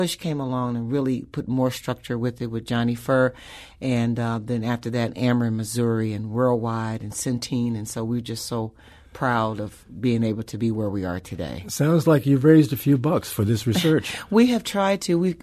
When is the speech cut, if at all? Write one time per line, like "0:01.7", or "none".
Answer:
none